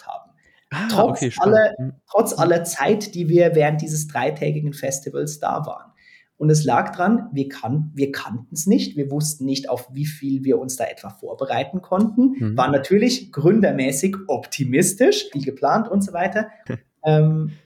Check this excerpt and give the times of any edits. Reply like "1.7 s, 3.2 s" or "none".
15.3 s, 16.7 s

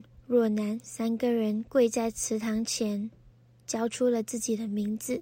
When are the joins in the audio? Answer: none

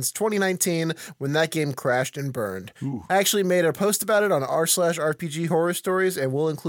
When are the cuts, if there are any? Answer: none

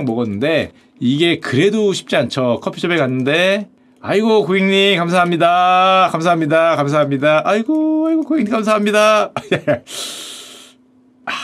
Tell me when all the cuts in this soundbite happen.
none

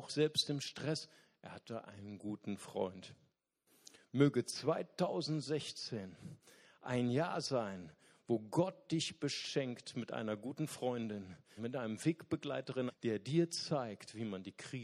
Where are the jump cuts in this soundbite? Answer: 11.6 s, 12.9 s

